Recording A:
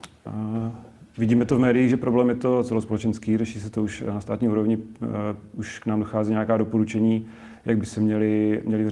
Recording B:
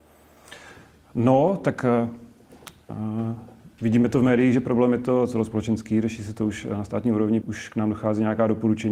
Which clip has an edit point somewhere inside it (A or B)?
B